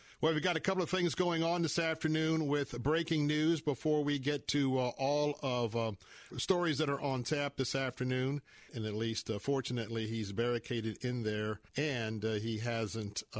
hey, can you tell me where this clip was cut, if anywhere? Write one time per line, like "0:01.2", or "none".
0:06.3
0:08.7
0:11.7